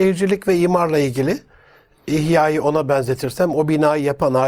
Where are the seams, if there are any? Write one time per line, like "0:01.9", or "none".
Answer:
none